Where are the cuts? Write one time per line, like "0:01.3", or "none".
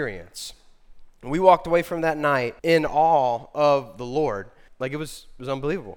0:02.6
0:04.7